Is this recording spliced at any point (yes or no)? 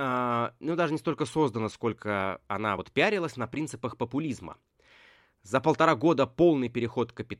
no